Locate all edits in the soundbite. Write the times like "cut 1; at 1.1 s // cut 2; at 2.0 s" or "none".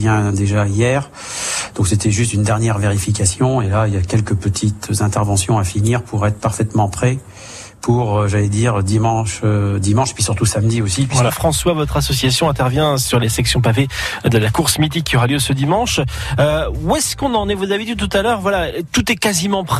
cut 1; at 11.3 s // cut 2; at 18.9 s